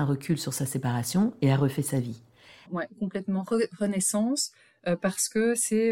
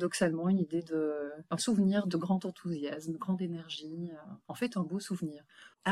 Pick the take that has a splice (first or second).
first